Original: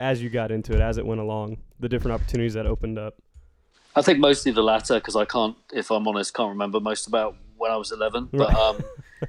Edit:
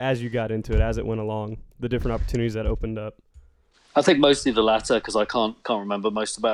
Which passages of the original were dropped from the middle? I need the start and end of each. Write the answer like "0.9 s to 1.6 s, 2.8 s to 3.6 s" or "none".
5.6 s to 6.3 s